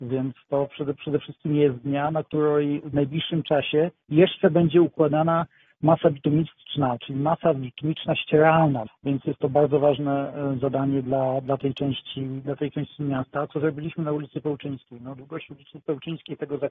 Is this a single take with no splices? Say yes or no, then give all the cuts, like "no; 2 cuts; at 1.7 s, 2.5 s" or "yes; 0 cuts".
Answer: no; 1 cut; at 8.9 s